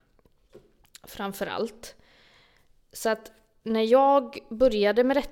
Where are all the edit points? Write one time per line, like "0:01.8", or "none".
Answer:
none